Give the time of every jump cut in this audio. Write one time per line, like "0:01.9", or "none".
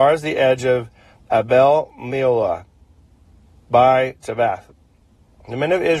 none